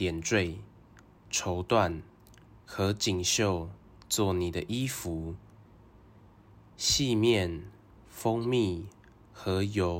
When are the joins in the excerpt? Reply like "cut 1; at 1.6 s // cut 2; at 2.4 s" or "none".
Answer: cut 1; at 1.2 s